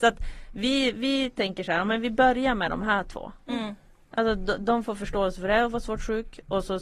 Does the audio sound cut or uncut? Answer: uncut